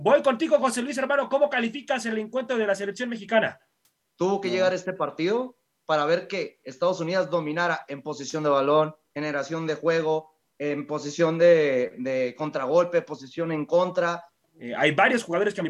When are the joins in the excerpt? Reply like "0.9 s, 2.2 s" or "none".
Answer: 4.0 s, 9.1 s, 14.4 s